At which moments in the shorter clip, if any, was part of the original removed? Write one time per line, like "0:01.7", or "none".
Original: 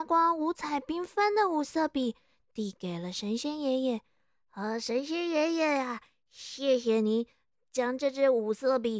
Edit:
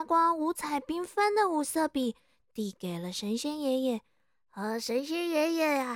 none